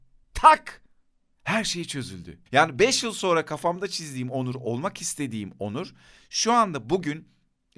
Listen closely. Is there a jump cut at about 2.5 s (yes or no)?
yes